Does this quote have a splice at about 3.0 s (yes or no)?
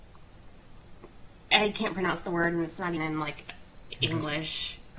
yes